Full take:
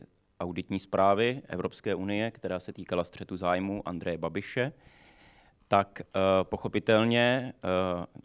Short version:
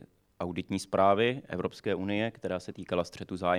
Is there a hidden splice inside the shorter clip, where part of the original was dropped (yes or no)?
no